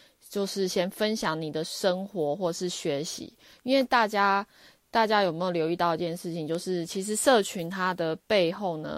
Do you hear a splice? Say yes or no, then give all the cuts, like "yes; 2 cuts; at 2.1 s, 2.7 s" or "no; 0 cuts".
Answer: no; 0 cuts